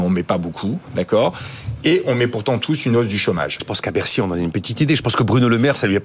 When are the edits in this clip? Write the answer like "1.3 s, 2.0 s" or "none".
3.6 s